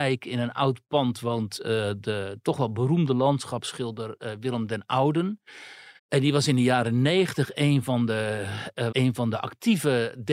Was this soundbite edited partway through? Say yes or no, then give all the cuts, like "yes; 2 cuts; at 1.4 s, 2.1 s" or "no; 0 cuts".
yes; 2 cuts; at 6.0 s, 8.9 s